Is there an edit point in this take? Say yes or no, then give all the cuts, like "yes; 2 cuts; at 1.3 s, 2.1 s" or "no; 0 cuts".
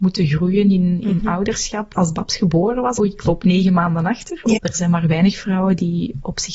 yes; 3 cuts; at 1.9 s, 3.0 s, 4.6 s